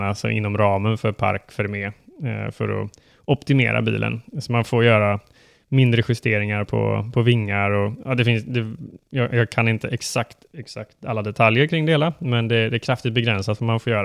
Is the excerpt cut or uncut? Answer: uncut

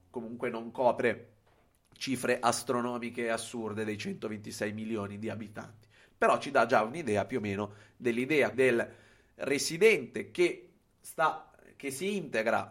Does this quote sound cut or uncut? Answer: cut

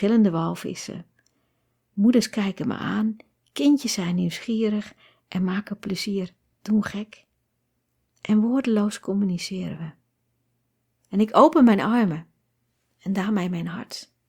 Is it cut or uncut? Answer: cut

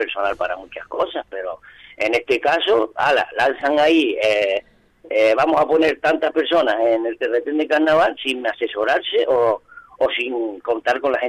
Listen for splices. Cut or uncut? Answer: uncut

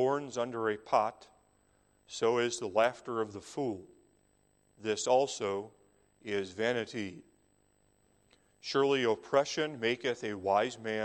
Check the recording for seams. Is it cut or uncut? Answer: uncut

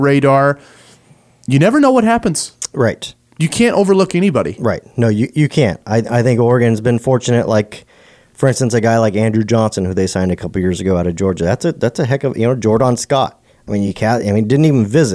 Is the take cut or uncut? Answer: uncut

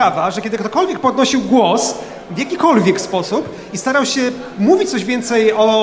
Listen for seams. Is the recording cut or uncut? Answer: uncut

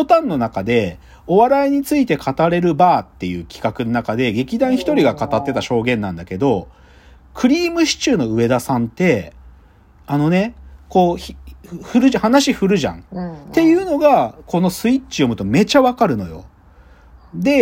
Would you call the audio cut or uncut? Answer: cut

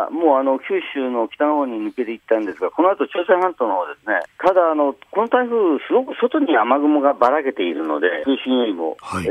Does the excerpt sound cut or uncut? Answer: cut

